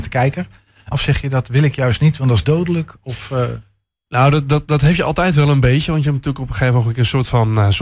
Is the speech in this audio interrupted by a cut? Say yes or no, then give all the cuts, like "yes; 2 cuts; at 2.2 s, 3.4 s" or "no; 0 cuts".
yes; 1 cut; at 0.9 s